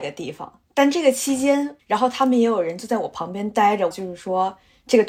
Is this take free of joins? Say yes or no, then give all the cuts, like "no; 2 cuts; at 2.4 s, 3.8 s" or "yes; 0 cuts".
no; 2 cuts; at 1.8 s, 3.9 s